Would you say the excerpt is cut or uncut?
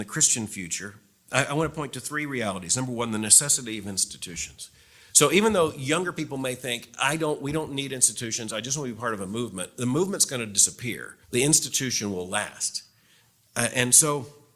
cut